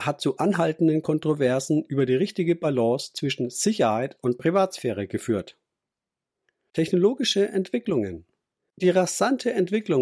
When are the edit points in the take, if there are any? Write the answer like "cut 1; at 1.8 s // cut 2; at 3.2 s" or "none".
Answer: none

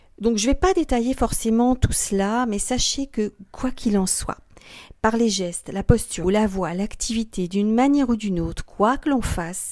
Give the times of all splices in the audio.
cut 1; at 6.2 s

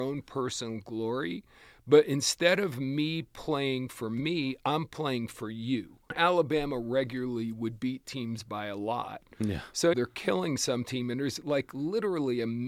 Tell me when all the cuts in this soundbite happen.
cut 1; at 6.1 s // cut 2; at 9.9 s

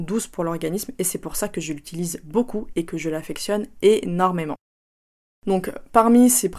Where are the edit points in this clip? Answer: none

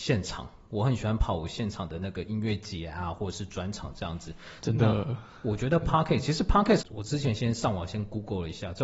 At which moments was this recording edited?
cut 1; at 4.6 s // cut 2; at 6.8 s

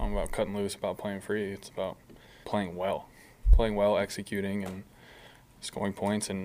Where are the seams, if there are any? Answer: cut 1; at 2.4 s

